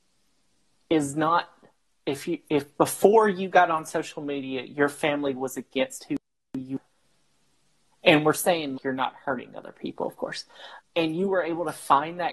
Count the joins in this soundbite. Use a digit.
2